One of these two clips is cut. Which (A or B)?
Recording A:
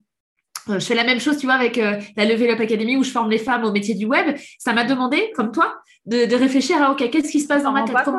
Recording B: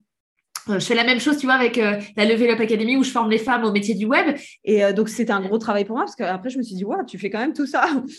B